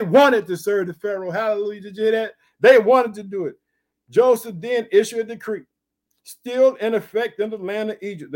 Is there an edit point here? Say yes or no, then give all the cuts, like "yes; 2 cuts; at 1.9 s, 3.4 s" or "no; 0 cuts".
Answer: no; 0 cuts